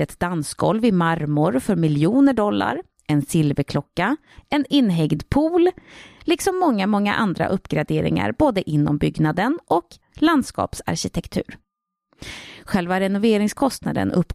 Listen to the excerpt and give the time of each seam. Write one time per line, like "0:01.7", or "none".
0:04.4
0:06.2

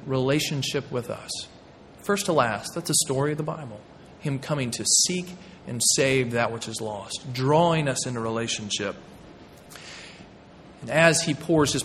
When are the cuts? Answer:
none

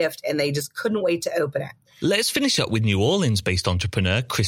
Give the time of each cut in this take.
none

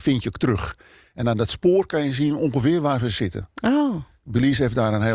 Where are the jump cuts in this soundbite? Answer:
none

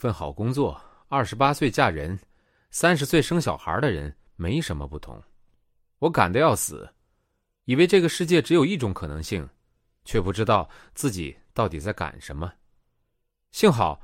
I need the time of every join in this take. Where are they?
none

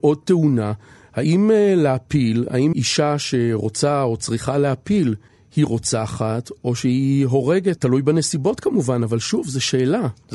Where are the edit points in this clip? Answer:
0:02.7
0:07.8

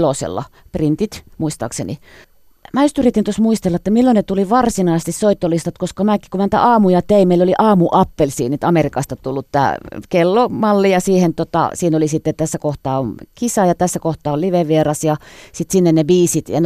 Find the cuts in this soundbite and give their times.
none

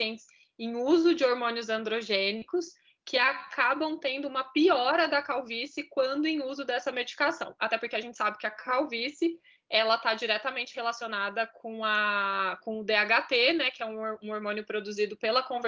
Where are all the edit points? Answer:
none

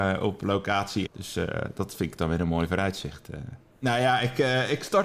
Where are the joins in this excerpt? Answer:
0:01.1
0:03.7

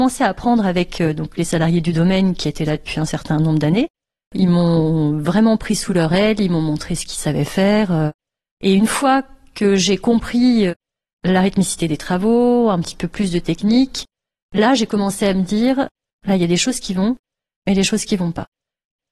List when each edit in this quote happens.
none

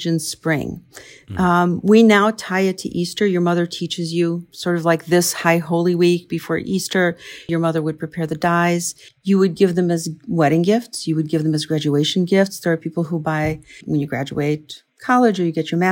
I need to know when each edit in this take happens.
0:07.5
0:09.1
0:13.8

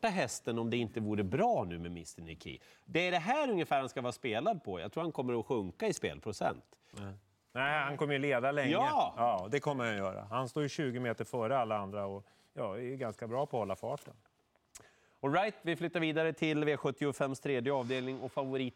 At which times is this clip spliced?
0:06.9

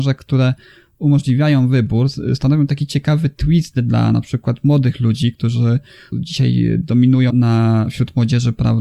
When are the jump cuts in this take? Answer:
0:06.1
0:07.3

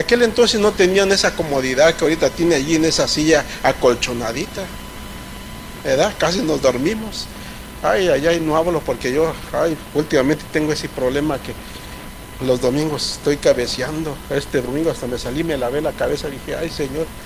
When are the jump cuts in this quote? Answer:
none

